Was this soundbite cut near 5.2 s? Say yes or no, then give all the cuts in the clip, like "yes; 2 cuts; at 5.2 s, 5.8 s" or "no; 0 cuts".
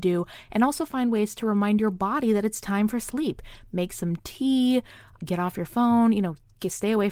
yes; 1 cut; at 5.2 s